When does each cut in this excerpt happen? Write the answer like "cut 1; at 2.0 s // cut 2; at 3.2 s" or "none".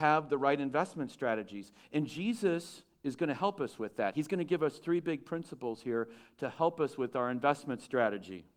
none